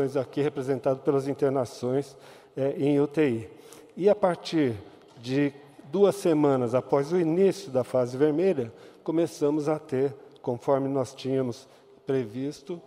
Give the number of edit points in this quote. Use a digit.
0